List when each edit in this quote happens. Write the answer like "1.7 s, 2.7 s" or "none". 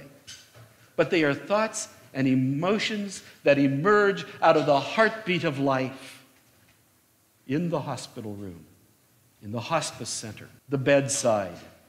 10.6 s